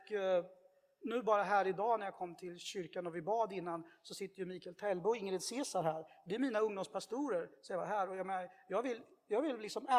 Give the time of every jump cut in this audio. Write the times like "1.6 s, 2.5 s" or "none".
none

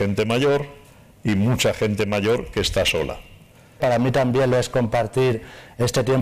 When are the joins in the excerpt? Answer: 3.8 s

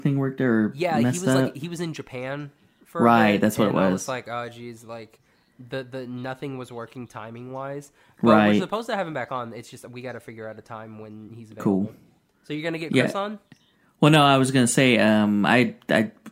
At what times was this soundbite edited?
none

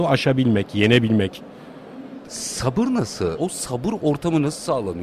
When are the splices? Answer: 2.2 s, 3.3 s

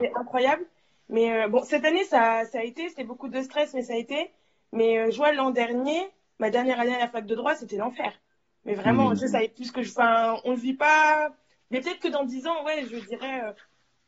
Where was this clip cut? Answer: none

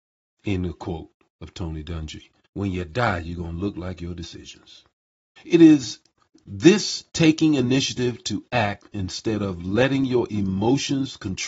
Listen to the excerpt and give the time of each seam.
2.4 s, 5.4 s

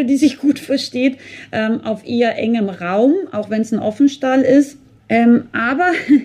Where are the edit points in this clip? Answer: 5.0 s

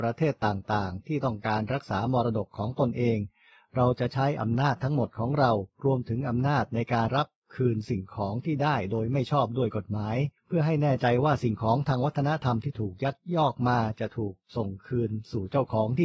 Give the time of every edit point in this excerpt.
7.1 s, 10.4 s

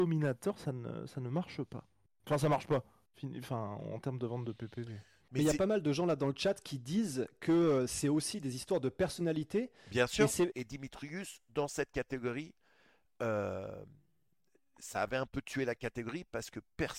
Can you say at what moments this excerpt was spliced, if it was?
10.5 s

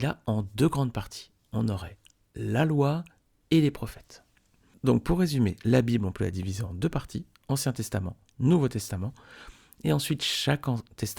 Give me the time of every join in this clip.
none

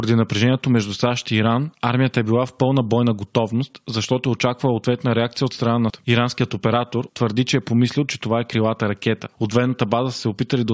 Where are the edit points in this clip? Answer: 5.9 s, 7.1 s

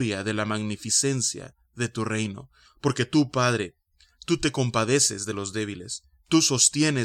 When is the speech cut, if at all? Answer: 2.7 s

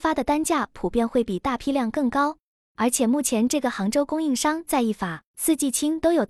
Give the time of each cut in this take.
5.3 s

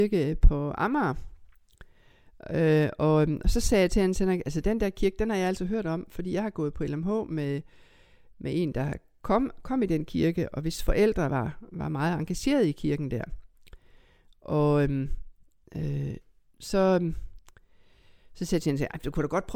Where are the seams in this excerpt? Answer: none

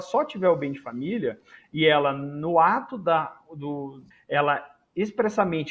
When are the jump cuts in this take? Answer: 4.1 s

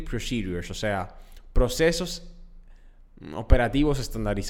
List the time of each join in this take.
none

